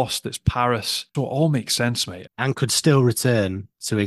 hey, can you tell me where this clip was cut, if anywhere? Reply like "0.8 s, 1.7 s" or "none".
1.1 s, 2.3 s